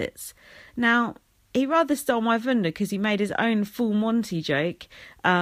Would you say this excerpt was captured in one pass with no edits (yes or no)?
yes